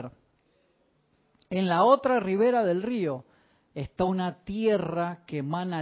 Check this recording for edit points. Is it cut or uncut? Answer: uncut